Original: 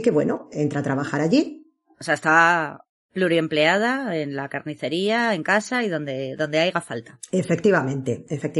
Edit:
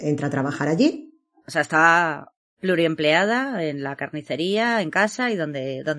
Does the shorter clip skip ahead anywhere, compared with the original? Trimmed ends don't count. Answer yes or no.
no